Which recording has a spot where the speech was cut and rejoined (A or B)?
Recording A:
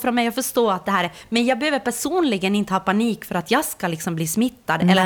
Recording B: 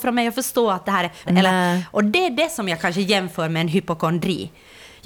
B